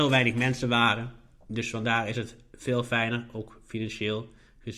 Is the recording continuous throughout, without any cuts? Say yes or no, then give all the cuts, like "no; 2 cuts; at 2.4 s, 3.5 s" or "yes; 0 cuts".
yes; 0 cuts